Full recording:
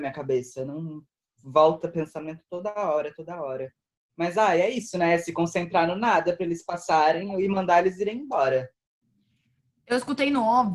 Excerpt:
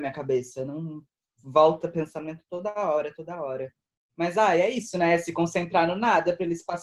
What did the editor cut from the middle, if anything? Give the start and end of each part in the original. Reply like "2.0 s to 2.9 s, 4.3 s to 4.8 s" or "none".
none